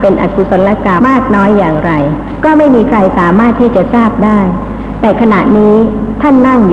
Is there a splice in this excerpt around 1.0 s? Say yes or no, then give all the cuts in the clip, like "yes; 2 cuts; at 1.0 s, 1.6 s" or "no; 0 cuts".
yes; 1 cut; at 1.0 s